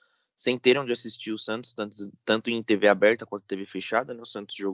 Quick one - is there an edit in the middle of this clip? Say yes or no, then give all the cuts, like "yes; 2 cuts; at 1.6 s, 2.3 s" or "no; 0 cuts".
no; 0 cuts